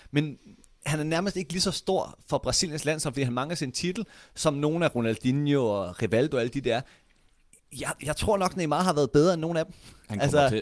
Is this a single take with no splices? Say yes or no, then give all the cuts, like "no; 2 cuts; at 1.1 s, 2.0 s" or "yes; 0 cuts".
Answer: yes; 0 cuts